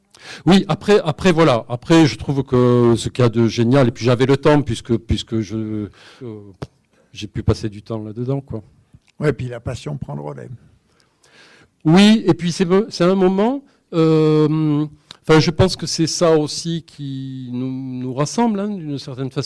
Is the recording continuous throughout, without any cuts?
no; 1 cut; at 6.2 s

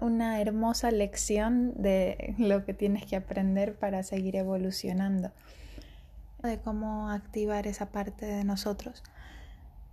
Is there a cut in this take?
yes; 1 cut; at 6.4 s

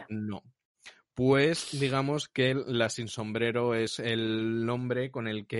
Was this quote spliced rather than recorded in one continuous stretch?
no; 0 cuts

